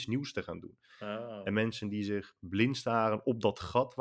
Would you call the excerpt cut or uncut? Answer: uncut